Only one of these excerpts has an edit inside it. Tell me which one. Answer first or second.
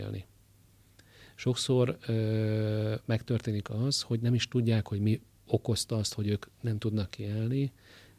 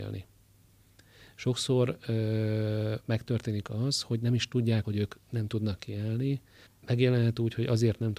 second